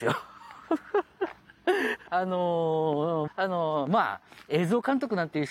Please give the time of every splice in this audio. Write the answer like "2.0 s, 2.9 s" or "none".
2.1 s, 3.3 s